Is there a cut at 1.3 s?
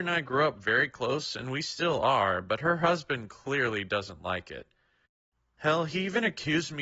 no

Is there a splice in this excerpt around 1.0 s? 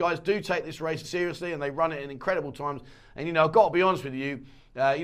yes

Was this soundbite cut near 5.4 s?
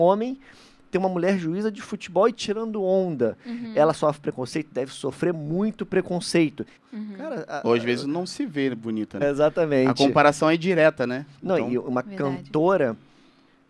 no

